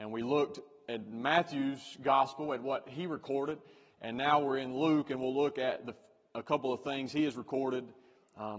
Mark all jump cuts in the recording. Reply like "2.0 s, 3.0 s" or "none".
none